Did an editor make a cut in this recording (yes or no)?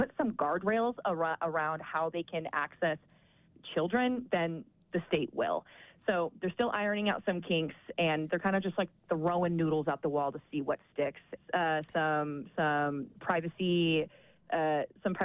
yes